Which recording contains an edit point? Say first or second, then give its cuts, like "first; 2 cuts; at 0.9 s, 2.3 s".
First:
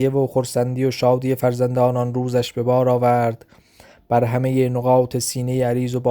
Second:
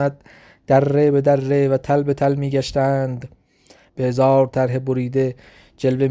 second; 1 cut; at 3.9 s